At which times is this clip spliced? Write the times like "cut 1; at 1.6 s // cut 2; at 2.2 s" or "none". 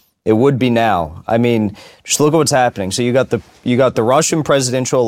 none